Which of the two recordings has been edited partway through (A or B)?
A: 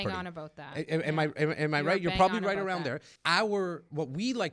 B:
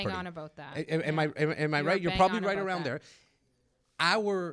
A